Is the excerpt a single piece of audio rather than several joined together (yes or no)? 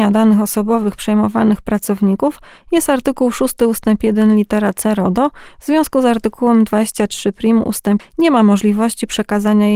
no